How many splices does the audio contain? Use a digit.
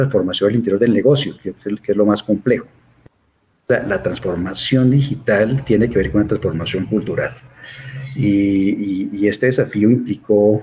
0